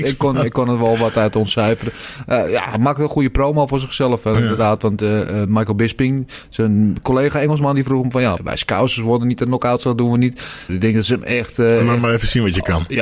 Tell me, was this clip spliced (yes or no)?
yes